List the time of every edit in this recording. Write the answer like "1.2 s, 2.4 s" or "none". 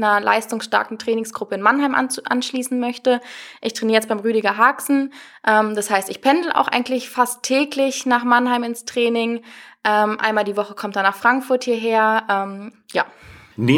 12.7 s